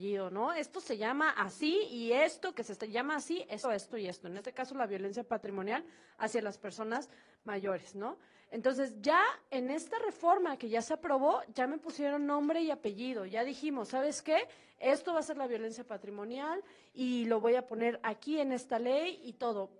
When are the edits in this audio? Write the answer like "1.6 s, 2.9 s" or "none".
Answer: 3.6 s